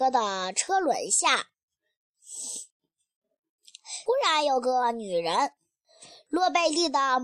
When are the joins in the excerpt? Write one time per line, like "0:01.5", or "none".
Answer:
0:04.1